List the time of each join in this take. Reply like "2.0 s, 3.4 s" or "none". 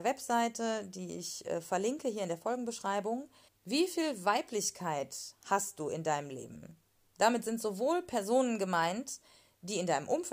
3.5 s